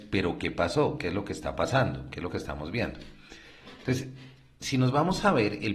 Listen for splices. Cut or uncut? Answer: uncut